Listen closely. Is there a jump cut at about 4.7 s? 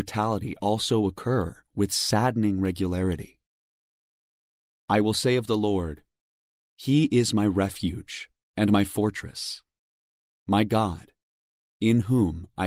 yes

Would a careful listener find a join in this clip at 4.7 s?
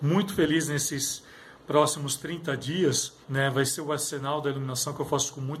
no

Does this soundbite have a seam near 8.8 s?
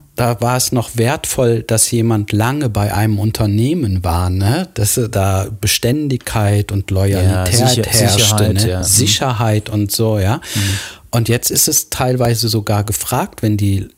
no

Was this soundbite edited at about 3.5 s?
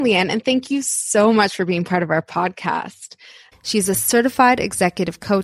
yes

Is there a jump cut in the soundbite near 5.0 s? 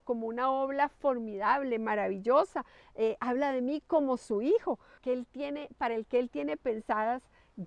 yes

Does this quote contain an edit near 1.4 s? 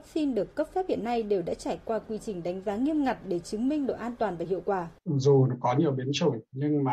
no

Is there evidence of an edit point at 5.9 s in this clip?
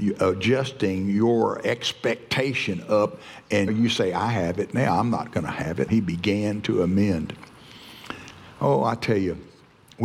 yes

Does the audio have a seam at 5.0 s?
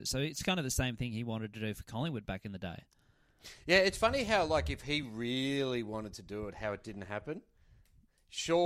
no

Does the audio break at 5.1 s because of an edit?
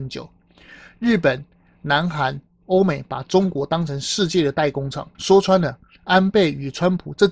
yes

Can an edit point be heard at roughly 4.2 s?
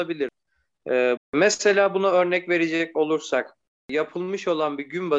no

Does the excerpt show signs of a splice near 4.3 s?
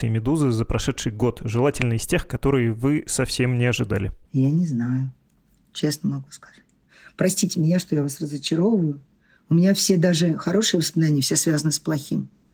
yes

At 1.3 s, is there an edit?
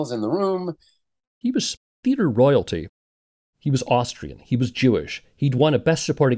yes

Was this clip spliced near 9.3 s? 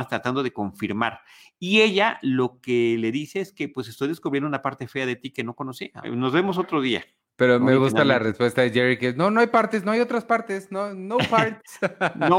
no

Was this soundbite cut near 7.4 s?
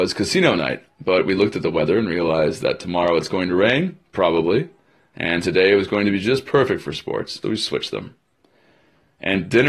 yes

